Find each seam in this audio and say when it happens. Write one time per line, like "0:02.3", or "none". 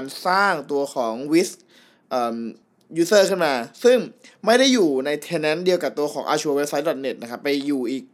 none